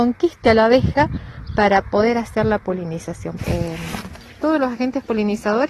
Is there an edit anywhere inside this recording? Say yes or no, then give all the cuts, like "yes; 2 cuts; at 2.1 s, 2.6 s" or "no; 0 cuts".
yes; 1 cut; at 3.4 s